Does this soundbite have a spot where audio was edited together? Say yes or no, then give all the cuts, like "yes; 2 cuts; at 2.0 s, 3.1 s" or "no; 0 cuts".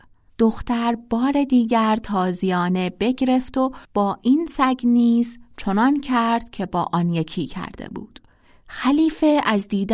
yes; 1 cut; at 3.8 s